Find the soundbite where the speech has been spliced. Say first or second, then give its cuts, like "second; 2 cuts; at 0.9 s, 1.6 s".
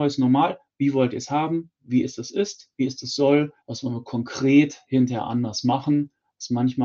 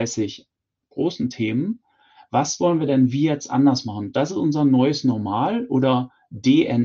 first; 1 cut; at 3.6 s